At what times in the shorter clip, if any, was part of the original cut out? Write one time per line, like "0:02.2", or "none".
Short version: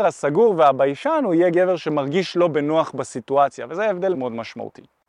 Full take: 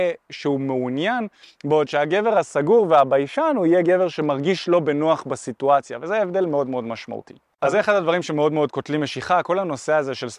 0:04.1